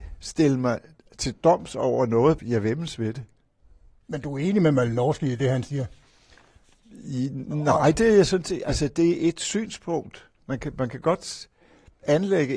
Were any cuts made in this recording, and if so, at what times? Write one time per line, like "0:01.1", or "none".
0:02.4
0:10.4